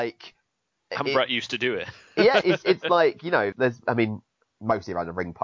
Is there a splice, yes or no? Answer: yes